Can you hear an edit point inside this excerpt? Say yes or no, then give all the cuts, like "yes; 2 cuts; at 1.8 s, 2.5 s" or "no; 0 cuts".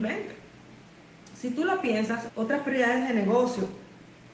yes; 1 cut; at 2.3 s